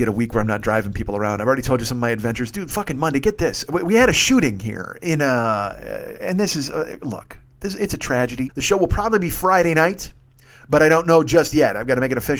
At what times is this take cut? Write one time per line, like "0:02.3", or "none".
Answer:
0:08.5